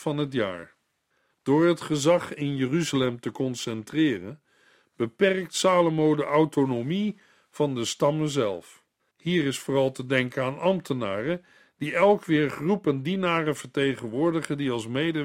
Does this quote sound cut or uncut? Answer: cut